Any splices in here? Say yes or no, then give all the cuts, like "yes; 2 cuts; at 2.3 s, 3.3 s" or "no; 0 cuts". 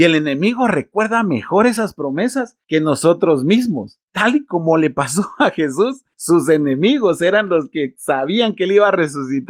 no; 0 cuts